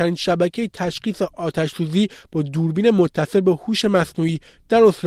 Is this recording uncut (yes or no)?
yes